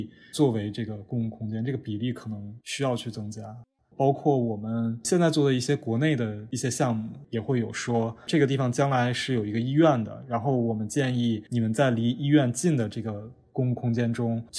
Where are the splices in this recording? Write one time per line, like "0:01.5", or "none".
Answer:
none